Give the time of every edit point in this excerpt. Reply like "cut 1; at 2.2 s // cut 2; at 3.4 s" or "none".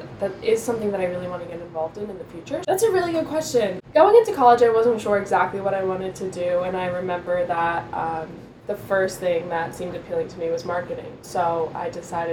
cut 1; at 2.6 s